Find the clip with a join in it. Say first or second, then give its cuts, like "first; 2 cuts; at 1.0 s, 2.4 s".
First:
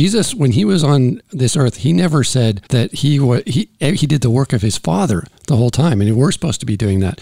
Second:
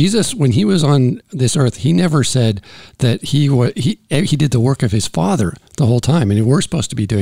first; 1 cut; at 2.7 s